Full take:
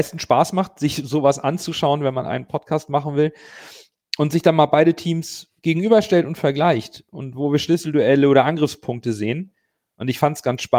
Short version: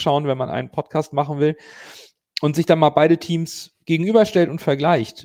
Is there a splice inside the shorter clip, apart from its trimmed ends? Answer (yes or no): no